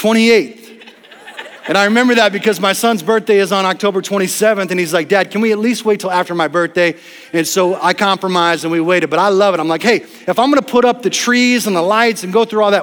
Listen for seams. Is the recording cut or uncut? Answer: uncut